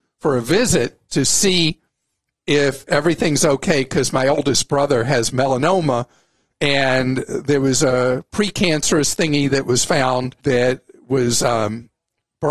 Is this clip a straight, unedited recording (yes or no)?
no